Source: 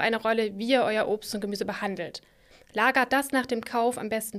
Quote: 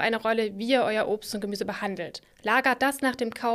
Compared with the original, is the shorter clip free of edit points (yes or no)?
no